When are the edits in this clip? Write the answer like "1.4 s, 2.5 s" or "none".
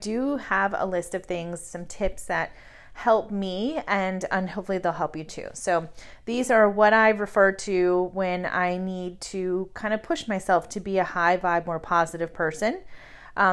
none